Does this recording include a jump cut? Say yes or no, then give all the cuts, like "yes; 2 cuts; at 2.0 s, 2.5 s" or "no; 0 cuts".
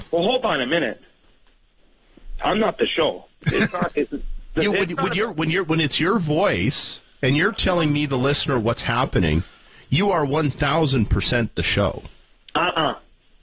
no; 0 cuts